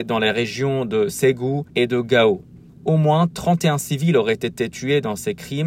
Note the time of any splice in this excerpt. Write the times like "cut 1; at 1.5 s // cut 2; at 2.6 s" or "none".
none